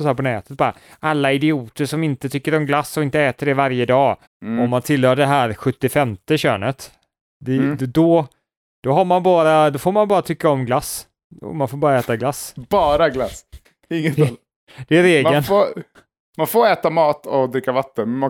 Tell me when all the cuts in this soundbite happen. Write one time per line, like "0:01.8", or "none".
0:04.2